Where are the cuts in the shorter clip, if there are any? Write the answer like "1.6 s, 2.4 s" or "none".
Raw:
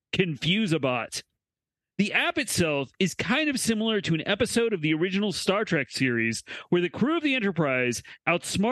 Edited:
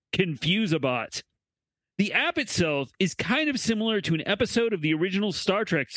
none